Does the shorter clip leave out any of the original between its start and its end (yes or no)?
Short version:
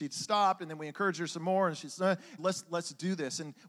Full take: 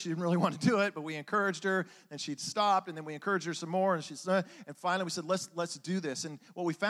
yes